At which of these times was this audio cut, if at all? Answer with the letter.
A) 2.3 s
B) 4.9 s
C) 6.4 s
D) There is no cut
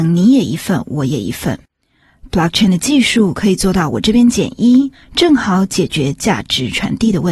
B